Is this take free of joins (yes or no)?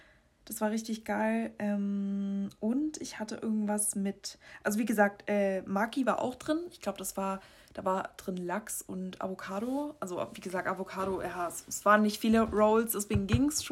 yes